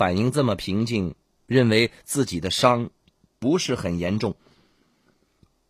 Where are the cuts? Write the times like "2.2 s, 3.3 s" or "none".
1.4 s